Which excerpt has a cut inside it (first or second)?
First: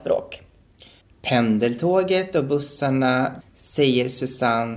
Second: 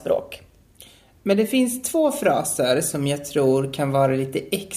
first